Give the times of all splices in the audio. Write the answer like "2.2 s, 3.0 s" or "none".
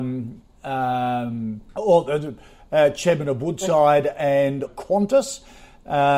1.7 s, 4.7 s